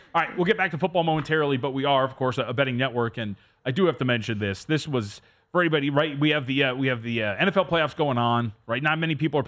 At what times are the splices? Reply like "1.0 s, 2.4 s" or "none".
none